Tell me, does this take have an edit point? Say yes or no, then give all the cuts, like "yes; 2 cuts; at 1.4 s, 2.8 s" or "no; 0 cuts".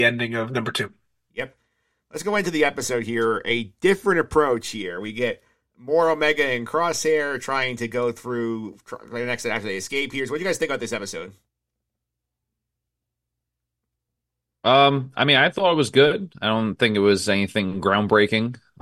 no; 0 cuts